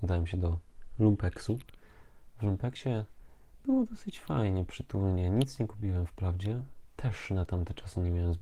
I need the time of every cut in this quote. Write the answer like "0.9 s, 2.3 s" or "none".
6.8 s